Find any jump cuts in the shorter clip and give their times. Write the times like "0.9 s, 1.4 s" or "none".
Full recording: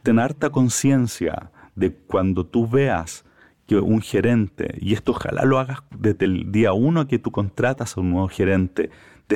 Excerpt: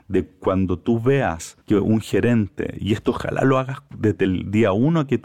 1.6 s